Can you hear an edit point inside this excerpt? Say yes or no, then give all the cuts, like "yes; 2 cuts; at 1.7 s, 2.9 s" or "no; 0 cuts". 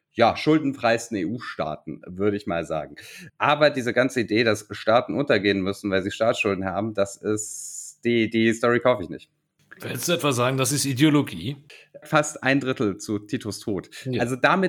yes; 2 cuts; at 3.3 s, 12.0 s